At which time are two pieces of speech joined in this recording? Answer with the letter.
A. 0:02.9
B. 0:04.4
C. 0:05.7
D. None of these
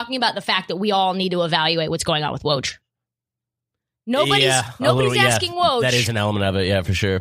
D